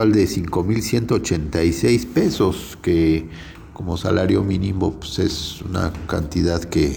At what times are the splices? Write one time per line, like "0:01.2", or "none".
none